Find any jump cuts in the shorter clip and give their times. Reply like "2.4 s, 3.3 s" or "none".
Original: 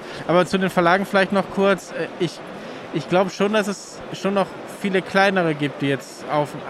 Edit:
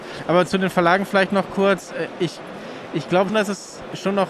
3.3 s